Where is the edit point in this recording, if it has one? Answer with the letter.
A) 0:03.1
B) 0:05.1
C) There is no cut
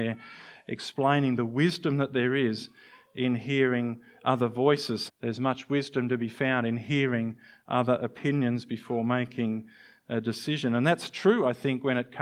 B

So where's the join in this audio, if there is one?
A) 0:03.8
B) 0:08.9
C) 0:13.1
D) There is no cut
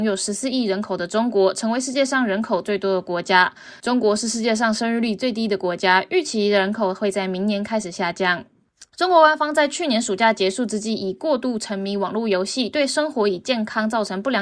A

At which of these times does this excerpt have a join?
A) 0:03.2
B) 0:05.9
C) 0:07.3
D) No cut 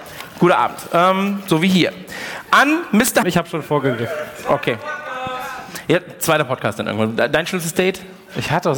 A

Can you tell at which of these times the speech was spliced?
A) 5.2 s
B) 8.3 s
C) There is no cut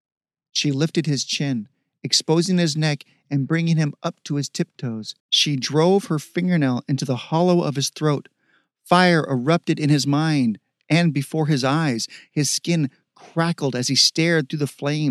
A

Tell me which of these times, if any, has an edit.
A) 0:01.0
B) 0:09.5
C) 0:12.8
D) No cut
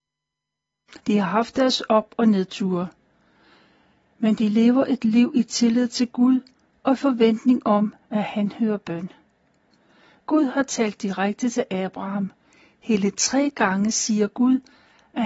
A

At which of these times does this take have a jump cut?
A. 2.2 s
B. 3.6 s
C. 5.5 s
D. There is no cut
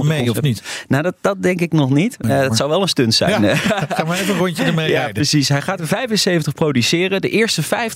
D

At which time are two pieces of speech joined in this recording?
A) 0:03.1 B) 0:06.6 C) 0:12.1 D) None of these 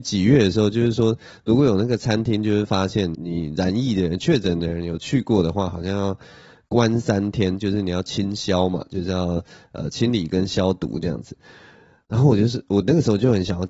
A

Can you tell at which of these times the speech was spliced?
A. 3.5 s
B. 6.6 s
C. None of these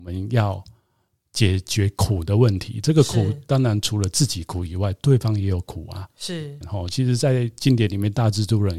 B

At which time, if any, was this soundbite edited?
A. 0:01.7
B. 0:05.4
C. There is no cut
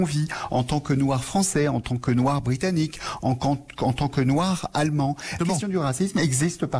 B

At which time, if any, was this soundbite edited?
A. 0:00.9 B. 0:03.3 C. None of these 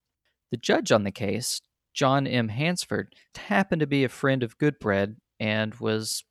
B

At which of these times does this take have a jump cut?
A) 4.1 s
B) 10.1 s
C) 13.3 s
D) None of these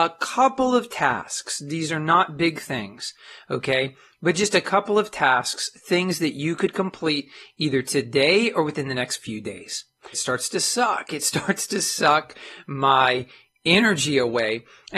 B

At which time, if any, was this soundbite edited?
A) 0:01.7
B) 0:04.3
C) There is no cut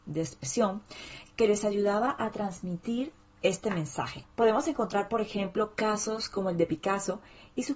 C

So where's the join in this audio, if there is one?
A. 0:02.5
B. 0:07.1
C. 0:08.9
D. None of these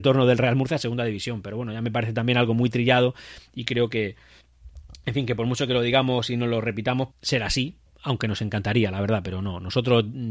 B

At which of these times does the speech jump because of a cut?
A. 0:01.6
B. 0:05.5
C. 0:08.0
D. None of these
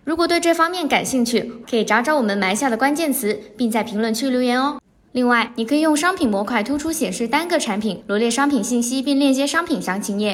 A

